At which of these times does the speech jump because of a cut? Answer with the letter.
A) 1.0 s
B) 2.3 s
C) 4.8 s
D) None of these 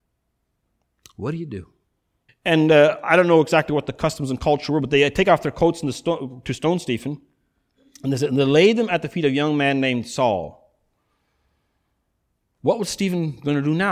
B